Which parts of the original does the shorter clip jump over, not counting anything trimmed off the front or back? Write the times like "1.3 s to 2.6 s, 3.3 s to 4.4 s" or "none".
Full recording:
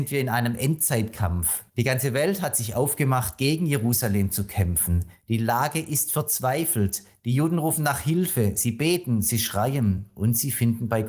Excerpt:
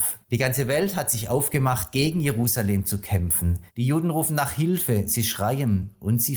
5.1 s to 7.2 s, 8.5 s to 9.2 s